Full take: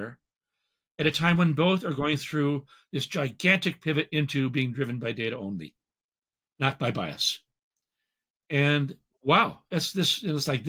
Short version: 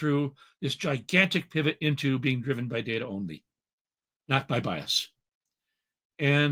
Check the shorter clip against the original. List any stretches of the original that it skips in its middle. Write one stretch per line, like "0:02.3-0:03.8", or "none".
none